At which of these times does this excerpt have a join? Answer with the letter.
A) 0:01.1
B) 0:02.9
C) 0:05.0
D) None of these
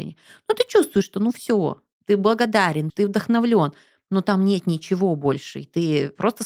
B